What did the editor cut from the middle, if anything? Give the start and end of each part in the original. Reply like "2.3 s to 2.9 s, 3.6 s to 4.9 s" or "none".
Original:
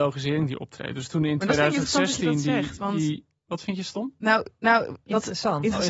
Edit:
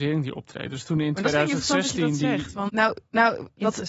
2.9 s to 4.2 s